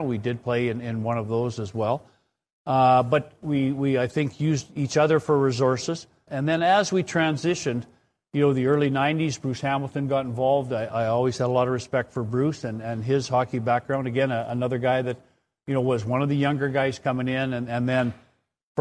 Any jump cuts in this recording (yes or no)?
yes